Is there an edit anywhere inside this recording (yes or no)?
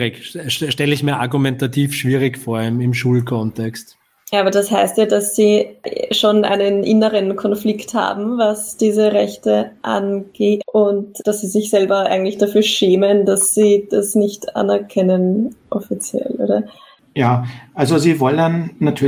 yes